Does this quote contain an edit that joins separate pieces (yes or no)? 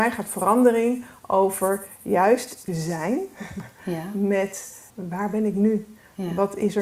yes